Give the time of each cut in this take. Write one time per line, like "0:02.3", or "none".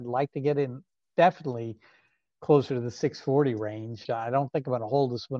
0:04.0